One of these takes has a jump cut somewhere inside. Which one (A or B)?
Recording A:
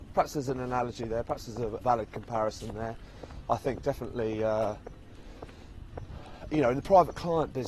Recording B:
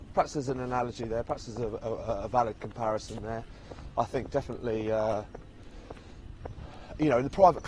A